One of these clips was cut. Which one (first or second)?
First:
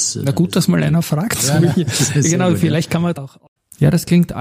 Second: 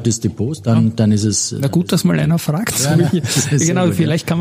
first